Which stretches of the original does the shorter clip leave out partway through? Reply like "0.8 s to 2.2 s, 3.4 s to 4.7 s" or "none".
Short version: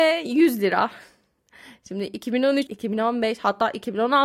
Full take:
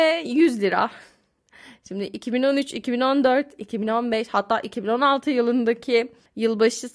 2.7 s to 3.6 s